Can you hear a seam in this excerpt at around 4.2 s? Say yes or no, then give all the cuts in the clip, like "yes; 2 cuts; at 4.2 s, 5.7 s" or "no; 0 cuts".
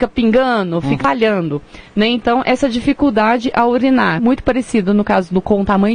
yes; 1 cut; at 4.2 s